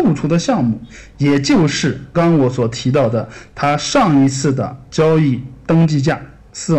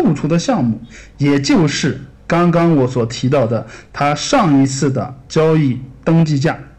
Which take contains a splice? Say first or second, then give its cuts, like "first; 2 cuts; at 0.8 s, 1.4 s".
first; 1 cut; at 2.1 s